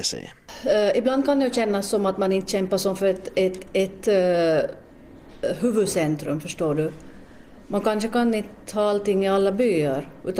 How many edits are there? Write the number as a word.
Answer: zero